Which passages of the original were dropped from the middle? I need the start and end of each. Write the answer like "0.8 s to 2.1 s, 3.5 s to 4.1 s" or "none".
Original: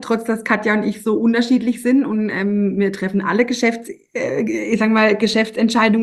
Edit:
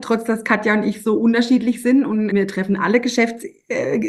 2.3 s to 2.8 s